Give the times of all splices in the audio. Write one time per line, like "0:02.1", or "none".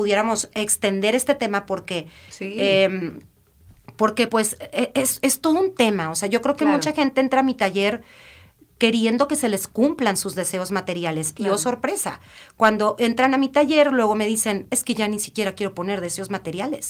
none